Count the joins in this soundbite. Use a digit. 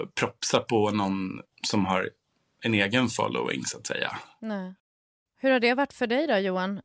1